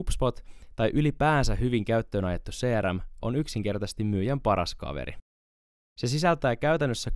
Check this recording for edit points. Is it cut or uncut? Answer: cut